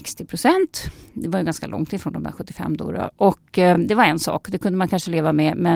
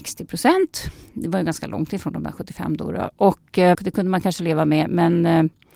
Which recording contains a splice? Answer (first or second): second